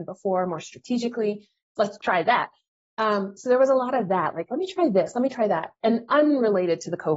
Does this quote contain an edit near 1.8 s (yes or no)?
yes